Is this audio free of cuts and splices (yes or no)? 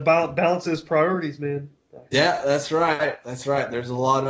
no